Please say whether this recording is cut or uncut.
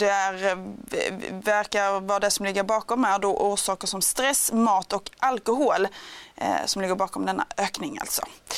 uncut